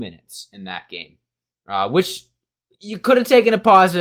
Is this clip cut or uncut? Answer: uncut